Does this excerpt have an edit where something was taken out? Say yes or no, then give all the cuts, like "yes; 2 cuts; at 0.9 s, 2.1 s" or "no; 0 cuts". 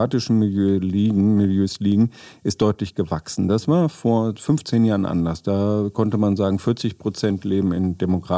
no; 0 cuts